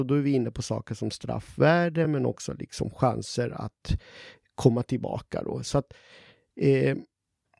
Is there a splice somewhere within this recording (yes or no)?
no